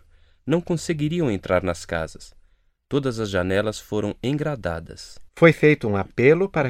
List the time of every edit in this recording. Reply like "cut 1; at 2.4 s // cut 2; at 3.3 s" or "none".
cut 1; at 5.3 s